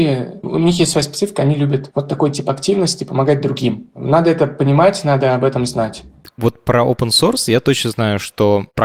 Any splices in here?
no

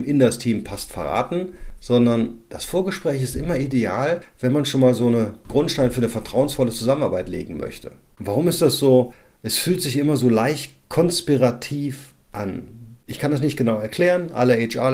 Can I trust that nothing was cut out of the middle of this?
yes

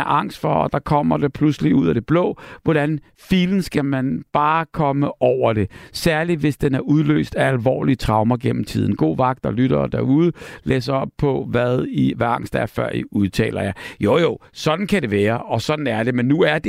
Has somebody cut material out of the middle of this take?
no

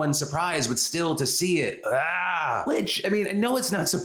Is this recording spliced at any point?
no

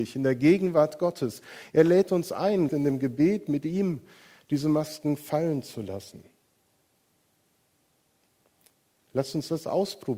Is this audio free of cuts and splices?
no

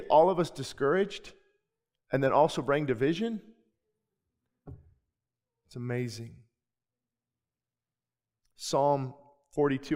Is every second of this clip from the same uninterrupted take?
yes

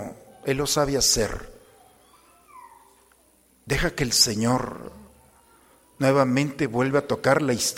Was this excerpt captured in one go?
yes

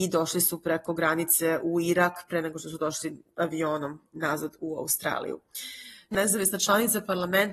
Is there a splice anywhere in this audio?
yes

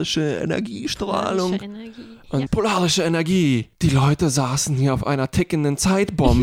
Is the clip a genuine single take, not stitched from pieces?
no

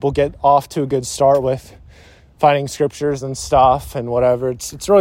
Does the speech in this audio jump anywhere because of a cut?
no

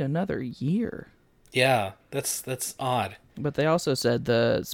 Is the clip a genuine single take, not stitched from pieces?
yes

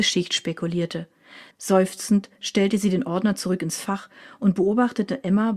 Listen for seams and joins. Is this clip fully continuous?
no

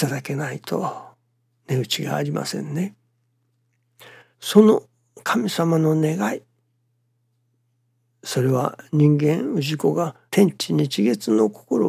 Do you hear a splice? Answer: yes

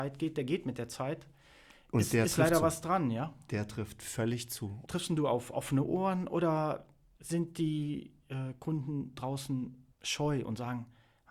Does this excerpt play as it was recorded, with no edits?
no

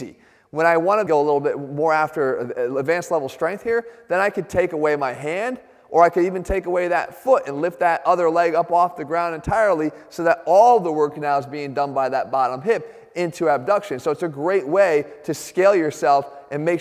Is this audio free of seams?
yes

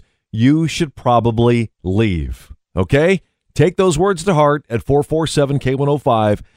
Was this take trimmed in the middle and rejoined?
no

